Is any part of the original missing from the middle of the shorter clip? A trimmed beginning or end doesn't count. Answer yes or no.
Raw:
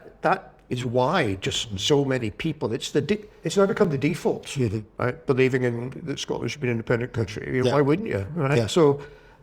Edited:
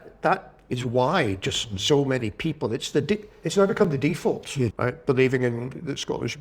yes